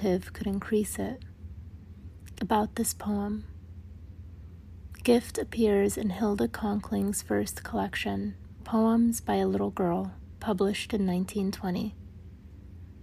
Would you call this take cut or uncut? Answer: cut